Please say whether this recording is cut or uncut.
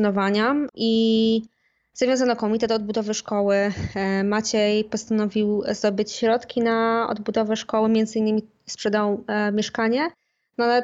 uncut